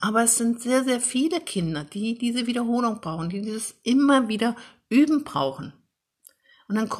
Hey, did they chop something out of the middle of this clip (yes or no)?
no